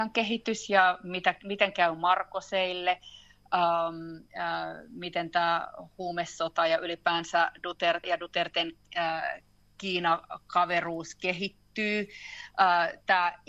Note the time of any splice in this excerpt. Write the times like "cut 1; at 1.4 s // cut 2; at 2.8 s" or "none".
cut 1; at 8.0 s